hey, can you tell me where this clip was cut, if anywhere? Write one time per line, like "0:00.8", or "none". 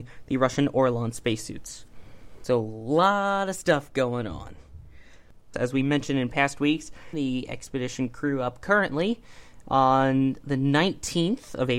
0:05.5
0:07.1